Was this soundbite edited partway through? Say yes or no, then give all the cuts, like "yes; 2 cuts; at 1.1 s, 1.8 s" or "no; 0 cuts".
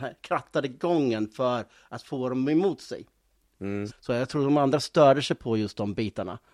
yes; 1 cut; at 3.9 s